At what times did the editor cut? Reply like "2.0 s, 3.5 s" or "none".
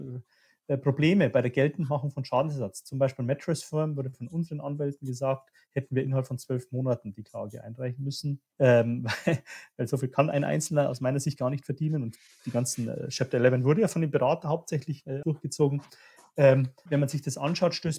8.5 s, 15.2 s, 16.9 s